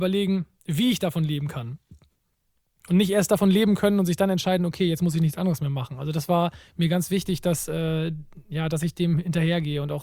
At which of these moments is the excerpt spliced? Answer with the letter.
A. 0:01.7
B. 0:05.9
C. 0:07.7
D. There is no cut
D